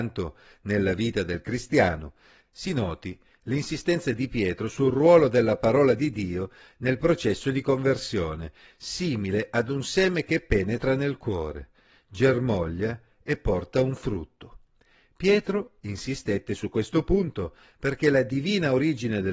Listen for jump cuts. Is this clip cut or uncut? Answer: cut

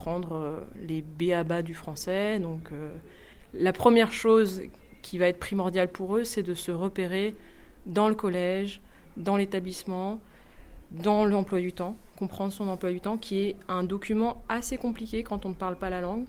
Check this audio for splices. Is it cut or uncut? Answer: uncut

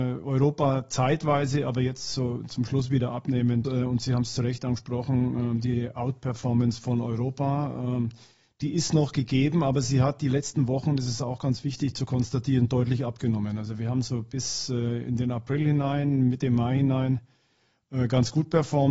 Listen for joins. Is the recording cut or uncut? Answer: cut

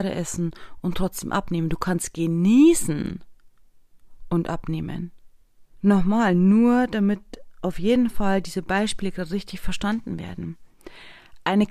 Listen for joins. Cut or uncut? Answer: cut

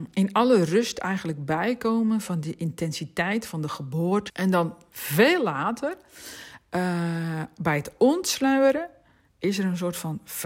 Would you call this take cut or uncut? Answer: cut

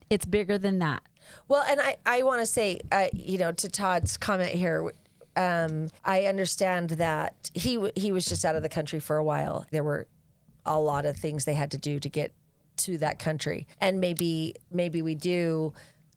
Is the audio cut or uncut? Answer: cut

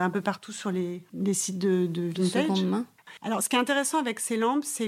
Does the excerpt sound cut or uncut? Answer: uncut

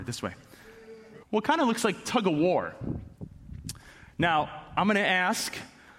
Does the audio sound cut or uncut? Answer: cut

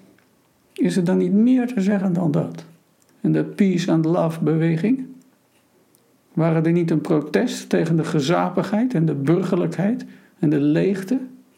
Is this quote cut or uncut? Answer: cut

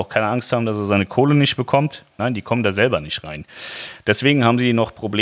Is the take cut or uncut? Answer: cut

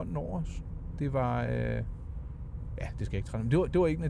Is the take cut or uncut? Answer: uncut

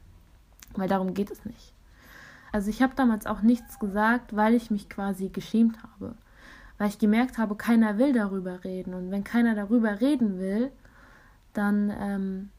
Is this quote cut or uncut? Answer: cut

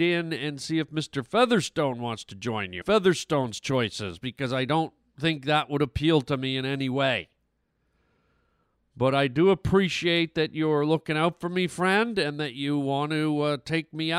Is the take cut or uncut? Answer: cut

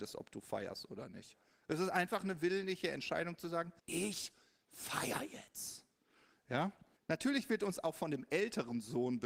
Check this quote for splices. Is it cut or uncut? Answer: cut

